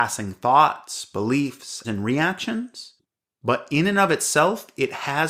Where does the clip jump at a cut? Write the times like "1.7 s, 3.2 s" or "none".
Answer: 1.8 s